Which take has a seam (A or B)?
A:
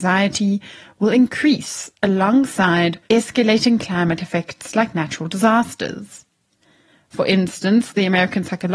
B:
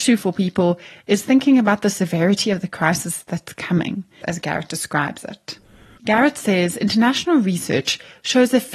B